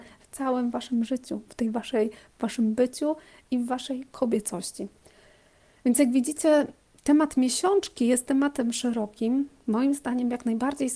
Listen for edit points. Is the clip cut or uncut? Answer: uncut